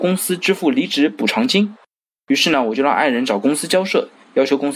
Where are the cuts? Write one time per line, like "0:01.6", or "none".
none